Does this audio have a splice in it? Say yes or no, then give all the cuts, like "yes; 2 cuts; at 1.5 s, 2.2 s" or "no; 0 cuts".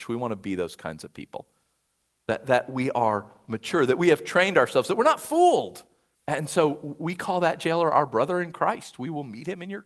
yes; 1 cut; at 6.1 s